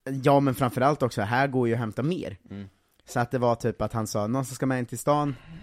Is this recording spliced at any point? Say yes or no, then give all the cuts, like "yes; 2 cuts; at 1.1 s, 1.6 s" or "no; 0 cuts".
no; 0 cuts